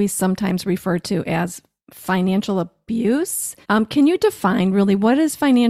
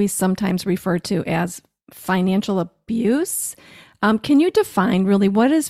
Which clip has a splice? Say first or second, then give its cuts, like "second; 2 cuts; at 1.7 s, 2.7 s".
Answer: first; 1 cut; at 3.6 s